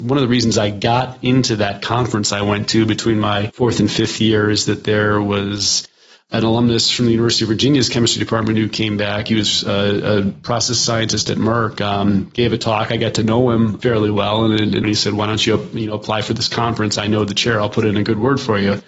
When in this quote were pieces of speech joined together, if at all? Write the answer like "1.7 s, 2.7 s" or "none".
14.8 s